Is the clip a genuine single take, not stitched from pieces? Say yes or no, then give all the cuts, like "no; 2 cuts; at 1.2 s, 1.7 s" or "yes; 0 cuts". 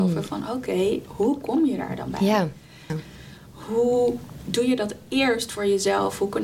no; 1 cut; at 2.9 s